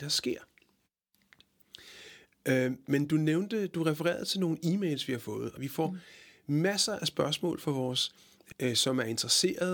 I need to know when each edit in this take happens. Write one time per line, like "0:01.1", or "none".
0:05.6
0:08.5